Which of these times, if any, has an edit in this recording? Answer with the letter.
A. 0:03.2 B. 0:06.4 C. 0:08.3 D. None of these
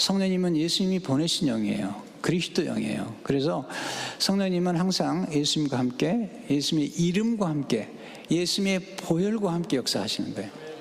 C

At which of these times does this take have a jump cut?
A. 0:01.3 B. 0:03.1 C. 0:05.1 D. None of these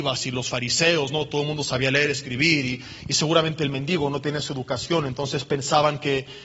D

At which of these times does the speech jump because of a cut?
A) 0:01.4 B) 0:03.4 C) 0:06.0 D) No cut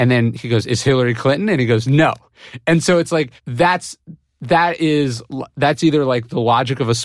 B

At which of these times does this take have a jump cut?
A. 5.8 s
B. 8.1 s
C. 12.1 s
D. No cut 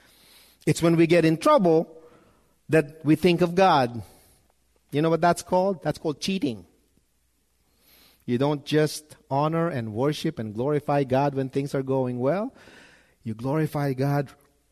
D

